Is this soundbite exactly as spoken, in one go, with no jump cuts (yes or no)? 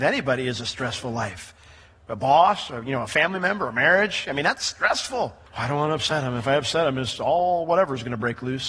yes